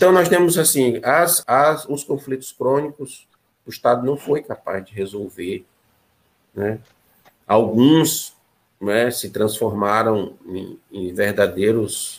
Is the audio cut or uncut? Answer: cut